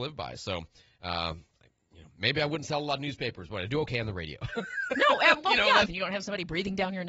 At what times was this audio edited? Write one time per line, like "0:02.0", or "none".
0:05.8